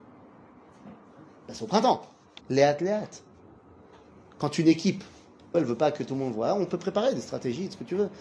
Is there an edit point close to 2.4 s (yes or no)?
yes